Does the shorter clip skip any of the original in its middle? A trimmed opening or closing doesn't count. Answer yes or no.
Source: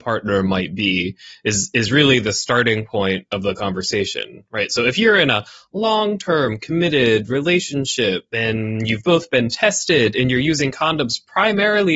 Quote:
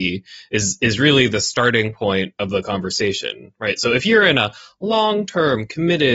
no